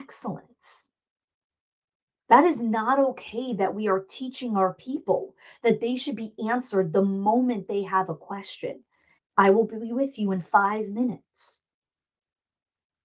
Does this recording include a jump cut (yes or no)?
yes